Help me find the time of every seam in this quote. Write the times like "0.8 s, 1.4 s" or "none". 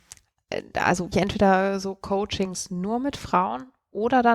1.1 s